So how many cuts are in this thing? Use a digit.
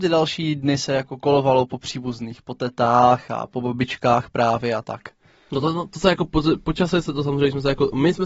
0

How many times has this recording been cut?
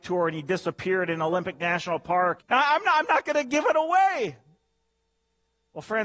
1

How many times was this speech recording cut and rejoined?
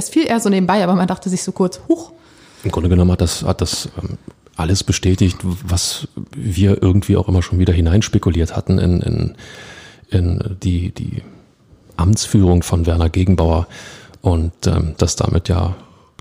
2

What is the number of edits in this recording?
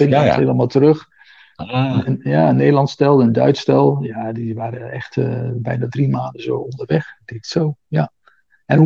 0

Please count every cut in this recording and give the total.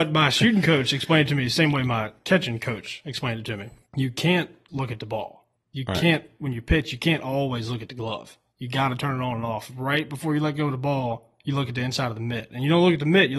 1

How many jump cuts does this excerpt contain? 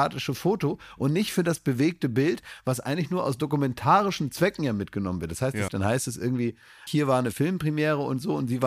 2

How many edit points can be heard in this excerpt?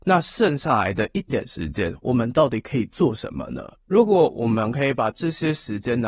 1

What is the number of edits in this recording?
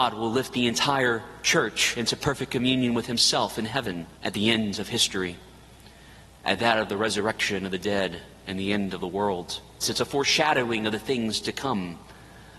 2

